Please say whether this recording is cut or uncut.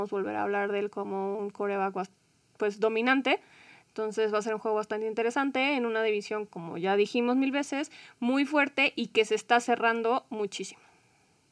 uncut